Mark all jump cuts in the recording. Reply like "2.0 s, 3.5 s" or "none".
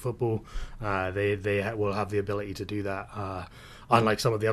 none